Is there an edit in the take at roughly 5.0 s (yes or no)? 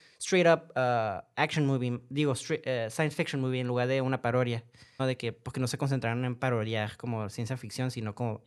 yes